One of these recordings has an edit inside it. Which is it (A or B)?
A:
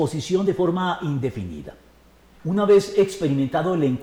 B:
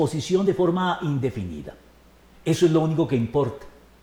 A